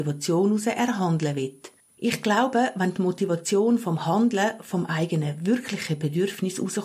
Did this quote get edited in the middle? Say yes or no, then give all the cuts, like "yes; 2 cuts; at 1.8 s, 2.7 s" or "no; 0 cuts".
yes; 1 cut; at 1.9 s